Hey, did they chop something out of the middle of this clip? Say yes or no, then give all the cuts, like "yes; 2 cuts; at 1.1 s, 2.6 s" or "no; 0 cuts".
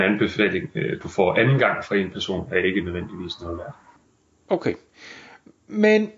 no; 0 cuts